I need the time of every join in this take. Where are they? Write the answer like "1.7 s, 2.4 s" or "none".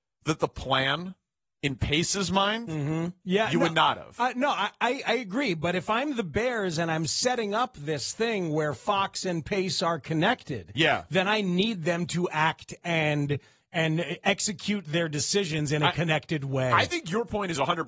3.2 s